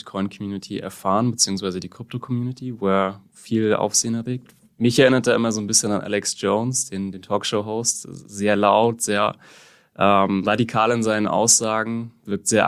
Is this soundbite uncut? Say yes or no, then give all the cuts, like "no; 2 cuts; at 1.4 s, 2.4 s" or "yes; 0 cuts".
yes; 0 cuts